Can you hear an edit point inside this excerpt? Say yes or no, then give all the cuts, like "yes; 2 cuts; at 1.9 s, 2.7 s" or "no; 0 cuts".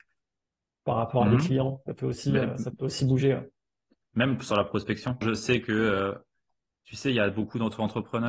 yes; 1 cut; at 5.2 s